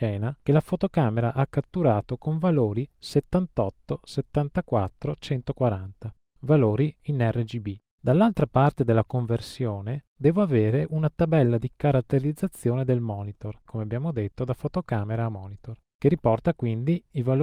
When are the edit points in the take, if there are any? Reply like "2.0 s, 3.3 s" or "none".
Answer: 7.9 s, 13.7 s